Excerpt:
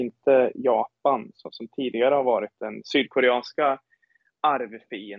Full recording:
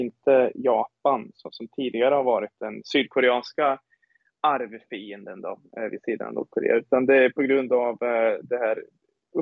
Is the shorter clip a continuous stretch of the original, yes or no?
yes